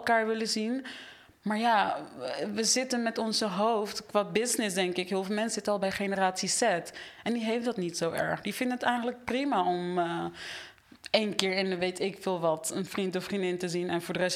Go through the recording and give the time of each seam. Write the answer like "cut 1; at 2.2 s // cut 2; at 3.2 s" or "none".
none